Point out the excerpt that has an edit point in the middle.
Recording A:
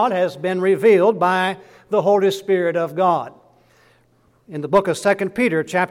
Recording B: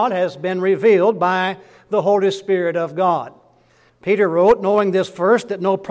B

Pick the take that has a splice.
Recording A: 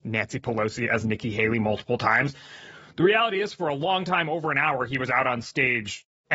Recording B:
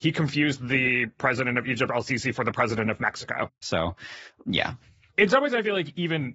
B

